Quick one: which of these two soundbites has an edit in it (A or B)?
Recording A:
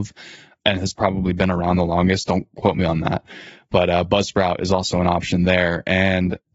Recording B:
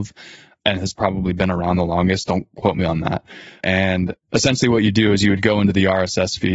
B